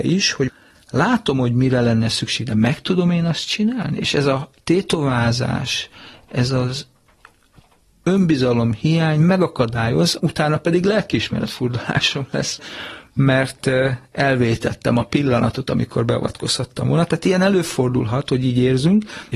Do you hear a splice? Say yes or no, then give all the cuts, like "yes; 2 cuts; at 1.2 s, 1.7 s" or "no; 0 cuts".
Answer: no; 0 cuts